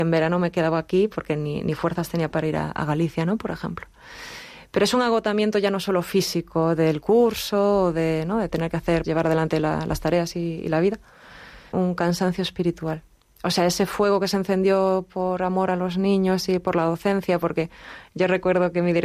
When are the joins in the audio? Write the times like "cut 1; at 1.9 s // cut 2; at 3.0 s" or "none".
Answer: cut 1; at 9.0 s // cut 2; at 11.7 s